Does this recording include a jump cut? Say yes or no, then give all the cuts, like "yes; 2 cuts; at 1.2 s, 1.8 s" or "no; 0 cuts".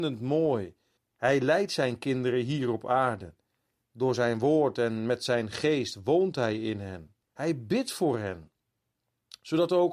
yes; 2 cuts; at 1.0 s, 7.2 s